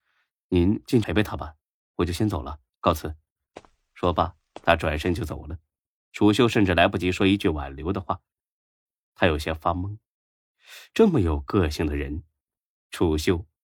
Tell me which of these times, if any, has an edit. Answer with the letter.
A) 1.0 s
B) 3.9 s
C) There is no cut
A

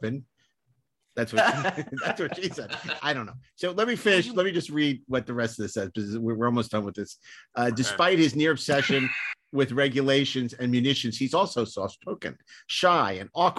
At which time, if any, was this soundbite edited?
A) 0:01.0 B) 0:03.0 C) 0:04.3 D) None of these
B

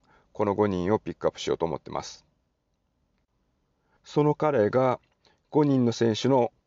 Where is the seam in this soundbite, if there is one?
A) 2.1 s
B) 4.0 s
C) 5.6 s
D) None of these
B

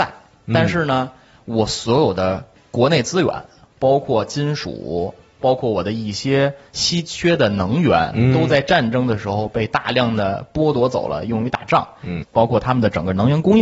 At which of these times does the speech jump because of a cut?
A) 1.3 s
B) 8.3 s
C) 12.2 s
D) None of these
C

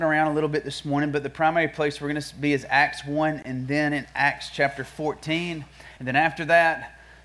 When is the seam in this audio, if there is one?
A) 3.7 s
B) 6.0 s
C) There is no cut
C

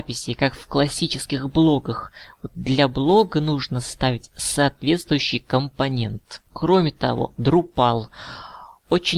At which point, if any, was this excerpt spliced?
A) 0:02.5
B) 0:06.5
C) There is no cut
B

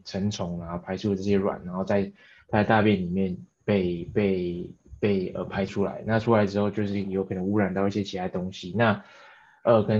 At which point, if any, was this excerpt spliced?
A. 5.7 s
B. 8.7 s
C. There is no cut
A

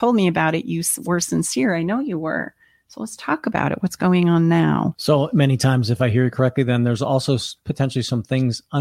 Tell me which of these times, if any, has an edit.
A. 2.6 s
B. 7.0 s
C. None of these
C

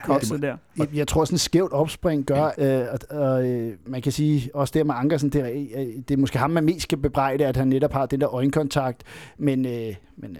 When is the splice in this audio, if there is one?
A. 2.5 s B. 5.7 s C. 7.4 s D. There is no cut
A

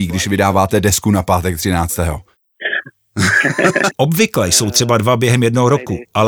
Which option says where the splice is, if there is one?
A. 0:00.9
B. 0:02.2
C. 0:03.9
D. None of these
C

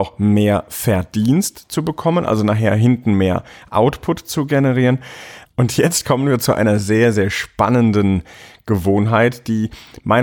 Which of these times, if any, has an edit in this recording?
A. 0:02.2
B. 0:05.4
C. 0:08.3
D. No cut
B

